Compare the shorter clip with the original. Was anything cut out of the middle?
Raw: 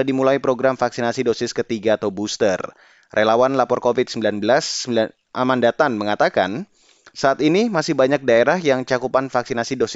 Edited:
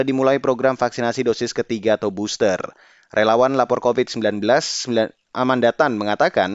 no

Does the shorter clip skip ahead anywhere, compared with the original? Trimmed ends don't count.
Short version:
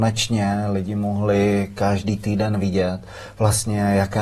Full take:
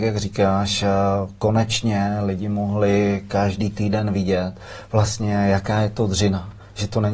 no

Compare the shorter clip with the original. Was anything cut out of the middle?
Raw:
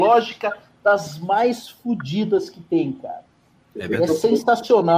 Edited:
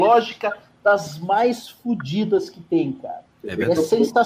yes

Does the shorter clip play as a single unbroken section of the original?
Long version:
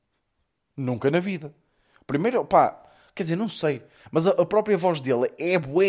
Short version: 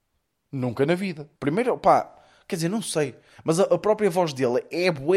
no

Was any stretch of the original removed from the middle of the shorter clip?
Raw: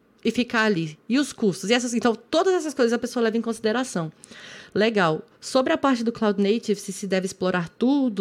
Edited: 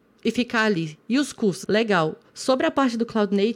yes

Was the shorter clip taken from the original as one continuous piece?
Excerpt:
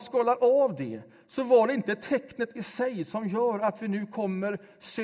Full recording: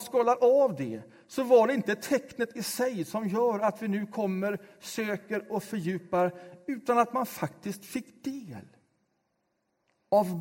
yes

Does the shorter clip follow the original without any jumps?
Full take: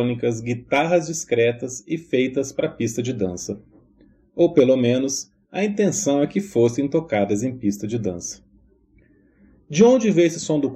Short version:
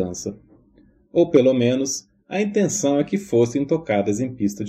yes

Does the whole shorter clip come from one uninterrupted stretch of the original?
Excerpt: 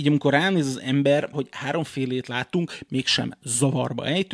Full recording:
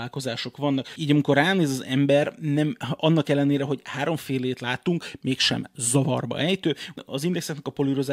no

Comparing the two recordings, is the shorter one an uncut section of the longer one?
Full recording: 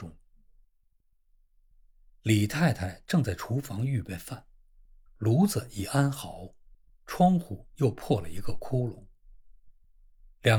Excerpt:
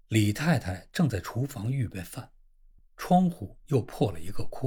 no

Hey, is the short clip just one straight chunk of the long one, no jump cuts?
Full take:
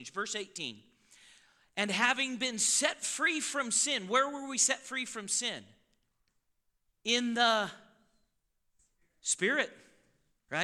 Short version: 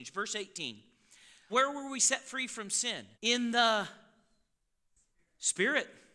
no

